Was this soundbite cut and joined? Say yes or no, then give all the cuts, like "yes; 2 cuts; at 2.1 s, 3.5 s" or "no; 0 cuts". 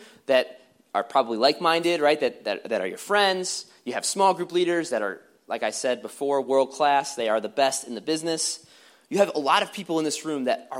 no; 0 cuts